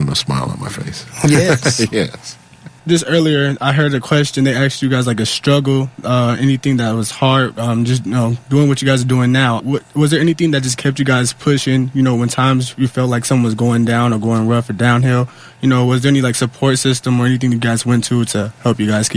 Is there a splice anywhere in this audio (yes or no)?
yes